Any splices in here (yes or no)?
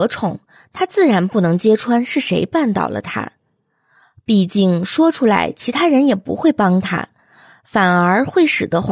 no